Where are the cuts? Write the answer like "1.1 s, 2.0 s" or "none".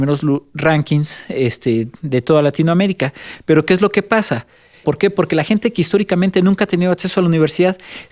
4.8 s